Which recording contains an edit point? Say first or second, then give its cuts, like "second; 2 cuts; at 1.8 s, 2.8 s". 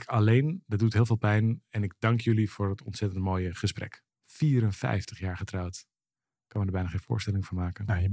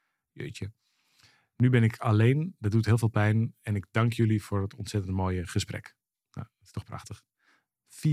first; 1 cut; at 4.1 s